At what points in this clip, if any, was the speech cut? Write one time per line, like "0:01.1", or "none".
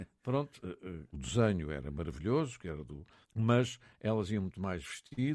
0:01.1
0:03.2